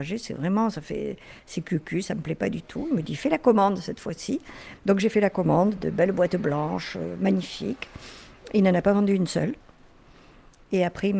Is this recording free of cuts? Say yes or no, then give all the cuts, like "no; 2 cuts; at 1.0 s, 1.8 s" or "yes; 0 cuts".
yes; 0 cuts